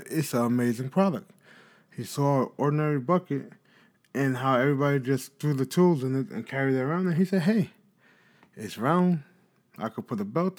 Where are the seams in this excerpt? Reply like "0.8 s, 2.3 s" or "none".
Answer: none